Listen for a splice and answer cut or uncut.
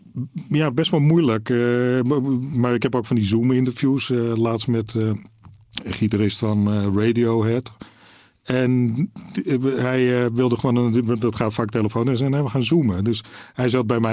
uncut